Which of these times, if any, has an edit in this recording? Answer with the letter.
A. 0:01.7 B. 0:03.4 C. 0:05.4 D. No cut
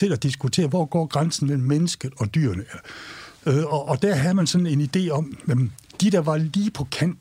D